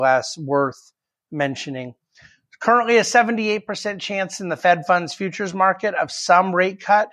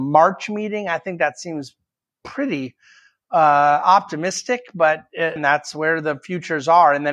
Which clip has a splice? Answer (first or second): second